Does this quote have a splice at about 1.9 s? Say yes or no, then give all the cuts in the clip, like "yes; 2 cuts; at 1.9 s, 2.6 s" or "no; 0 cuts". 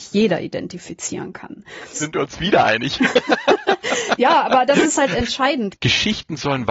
yes; 2 cuts; at 1.9 s, 5.7 s